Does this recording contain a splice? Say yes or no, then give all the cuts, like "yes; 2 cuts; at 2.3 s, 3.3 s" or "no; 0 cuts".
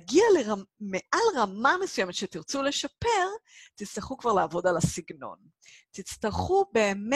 no; 0 cuts